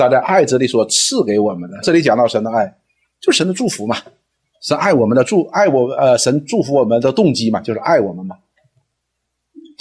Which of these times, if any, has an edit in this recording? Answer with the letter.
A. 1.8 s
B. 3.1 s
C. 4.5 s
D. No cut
A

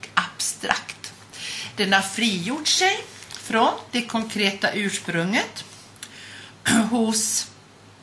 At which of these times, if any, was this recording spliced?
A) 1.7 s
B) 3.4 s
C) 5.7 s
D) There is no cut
D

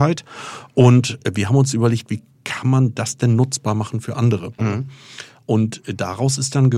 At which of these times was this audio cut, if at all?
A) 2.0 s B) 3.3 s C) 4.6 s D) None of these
C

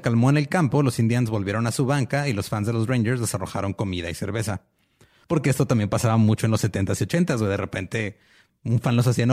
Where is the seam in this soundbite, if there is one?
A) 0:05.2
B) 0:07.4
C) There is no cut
A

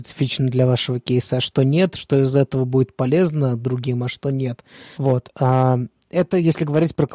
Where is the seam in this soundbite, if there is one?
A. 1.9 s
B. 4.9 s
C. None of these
B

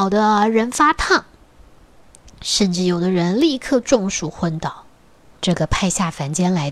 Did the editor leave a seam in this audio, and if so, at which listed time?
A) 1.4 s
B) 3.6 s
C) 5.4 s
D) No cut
C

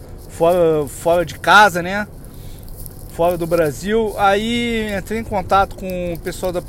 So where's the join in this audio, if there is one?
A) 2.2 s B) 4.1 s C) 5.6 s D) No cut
D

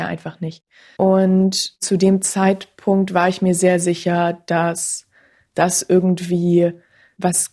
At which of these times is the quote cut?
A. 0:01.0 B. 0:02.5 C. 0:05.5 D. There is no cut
A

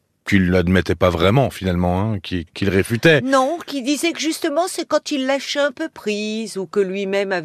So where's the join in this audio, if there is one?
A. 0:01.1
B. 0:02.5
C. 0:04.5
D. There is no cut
B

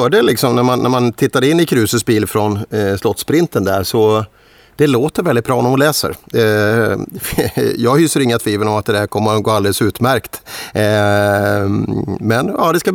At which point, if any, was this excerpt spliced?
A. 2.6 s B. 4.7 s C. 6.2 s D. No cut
D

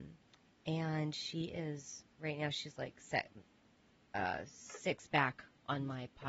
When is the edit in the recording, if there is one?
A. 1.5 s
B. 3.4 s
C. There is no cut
C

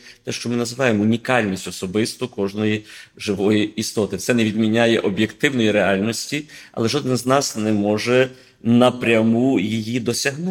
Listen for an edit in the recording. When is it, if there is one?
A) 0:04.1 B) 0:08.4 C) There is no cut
C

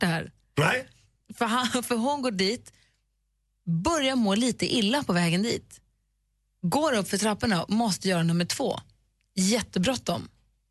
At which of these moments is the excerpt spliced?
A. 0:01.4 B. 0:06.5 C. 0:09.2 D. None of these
D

